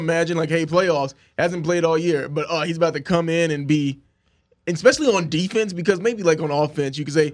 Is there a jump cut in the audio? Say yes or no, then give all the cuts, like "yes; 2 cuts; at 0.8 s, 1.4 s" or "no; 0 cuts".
no; 0 cuts